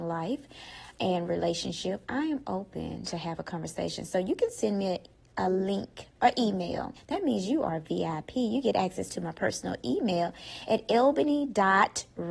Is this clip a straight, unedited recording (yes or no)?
no